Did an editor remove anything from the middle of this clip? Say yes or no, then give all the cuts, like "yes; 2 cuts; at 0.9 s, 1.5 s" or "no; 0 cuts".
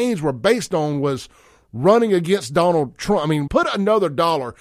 yes; 1 cut; at 3.5 s